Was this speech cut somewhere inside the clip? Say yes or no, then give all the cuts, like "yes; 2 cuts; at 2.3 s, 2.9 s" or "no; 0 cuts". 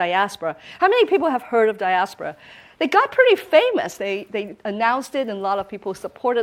no; 0 cuts